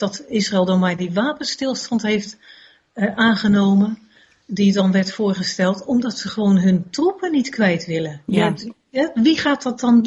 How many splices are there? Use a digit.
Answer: 0